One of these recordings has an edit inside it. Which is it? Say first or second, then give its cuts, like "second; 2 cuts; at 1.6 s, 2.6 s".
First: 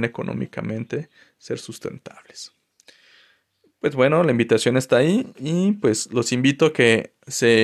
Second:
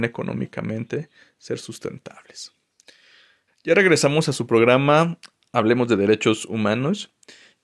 second; 1 cut; at 3.5 s